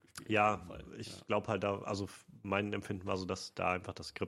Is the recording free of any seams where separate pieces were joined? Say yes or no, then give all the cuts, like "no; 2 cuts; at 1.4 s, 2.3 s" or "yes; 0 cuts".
yes; 0 cuts